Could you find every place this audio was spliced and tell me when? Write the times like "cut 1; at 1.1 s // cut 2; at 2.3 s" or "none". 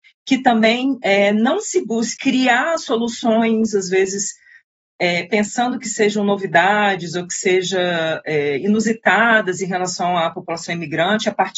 cut 1; at 2.2 s

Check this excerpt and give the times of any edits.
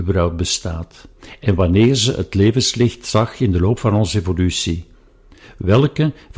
none

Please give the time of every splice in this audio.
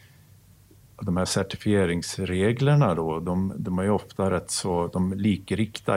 none

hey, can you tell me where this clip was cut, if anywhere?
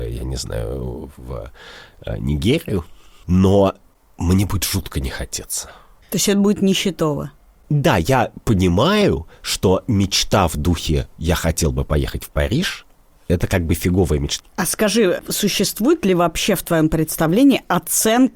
cut 1; at 14.4 s

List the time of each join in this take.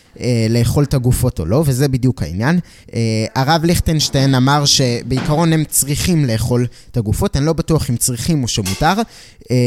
none

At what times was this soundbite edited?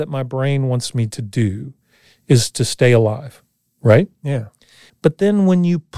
cut 1; at 4.9 s

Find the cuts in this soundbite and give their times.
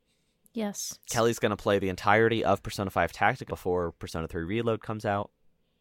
cut 1; at 1.1 s // cut 2; at 3.5 s

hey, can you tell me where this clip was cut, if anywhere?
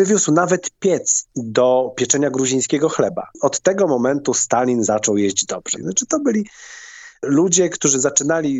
cut 1; at 5.8 s

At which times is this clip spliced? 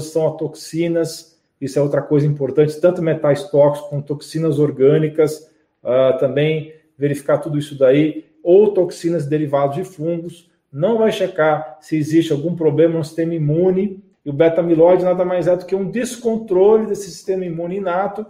cut 1; at 14.1 s

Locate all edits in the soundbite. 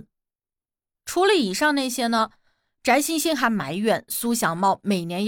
none

